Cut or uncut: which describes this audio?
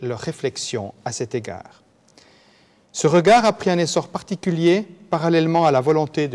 uncut